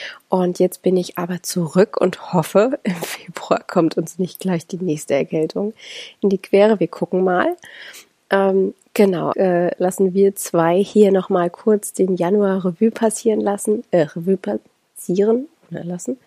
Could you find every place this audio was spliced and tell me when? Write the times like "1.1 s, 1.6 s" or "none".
9.3 s